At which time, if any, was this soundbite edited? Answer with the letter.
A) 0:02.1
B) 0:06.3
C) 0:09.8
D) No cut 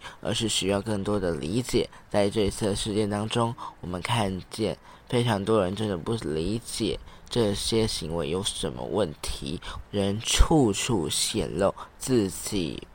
C